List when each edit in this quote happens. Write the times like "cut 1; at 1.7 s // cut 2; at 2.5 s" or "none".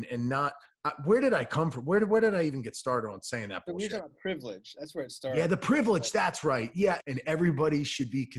cut 1; at 7.0 s